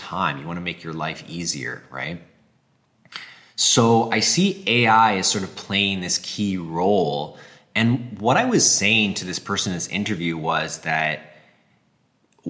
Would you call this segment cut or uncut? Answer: uncut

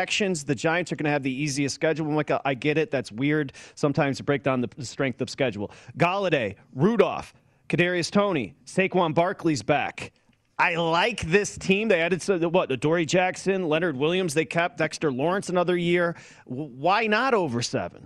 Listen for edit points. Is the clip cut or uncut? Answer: uncut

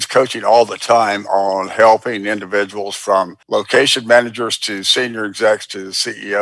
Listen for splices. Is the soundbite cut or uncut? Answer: cut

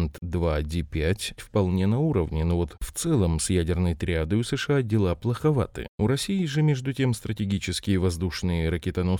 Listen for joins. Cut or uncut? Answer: cut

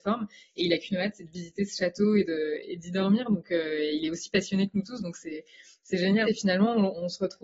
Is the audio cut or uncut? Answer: cut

